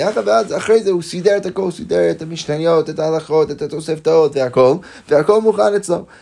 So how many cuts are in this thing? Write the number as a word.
zero